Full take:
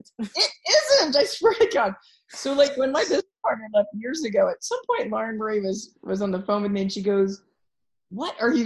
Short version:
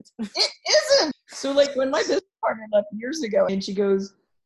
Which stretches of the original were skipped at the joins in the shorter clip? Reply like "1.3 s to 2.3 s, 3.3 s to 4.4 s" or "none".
1.1 s to 2.1 s, 4.5 s to 6.8 s

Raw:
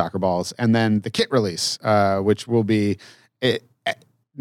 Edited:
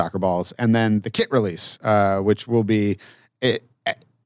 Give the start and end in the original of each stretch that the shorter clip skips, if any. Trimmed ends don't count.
none

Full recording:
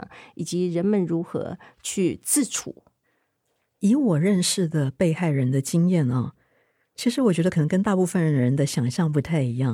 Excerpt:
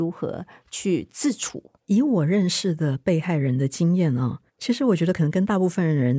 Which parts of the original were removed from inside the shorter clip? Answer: 2.9 s to 3.7 s, 6.4 s to 6.9 s

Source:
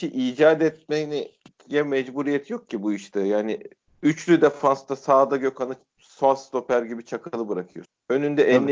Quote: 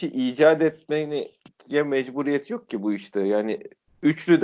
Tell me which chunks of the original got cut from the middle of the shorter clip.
none

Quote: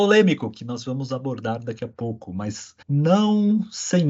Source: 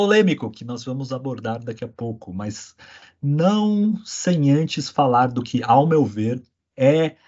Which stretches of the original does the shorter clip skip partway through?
2.8 s to 3.1 s

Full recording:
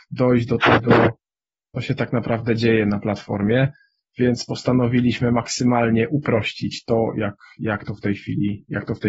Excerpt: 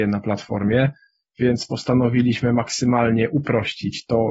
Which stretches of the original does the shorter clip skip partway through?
none

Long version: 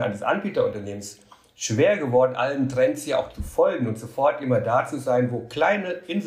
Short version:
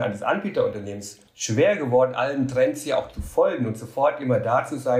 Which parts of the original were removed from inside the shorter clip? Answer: 1.3 s to 1.5 s

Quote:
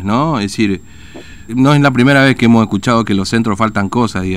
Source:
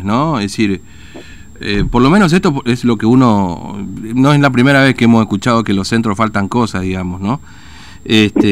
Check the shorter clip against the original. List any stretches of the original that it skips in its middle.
1.5 s to 4.1 s

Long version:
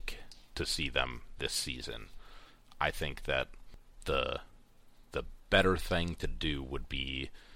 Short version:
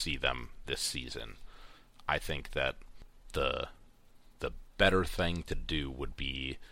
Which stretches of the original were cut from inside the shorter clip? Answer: none

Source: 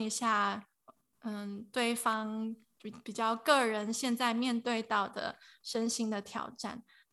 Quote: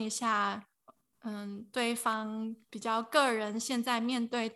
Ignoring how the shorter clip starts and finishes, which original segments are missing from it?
2.7 s to 3.0 s

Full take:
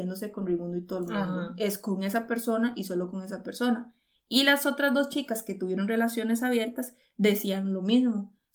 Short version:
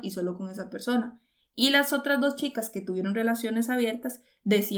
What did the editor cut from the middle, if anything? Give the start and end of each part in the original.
none

